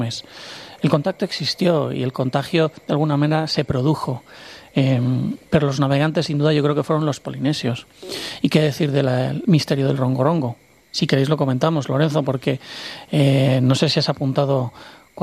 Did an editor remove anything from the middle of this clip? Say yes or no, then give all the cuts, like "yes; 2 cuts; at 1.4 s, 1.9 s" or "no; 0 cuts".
no; 0 cuts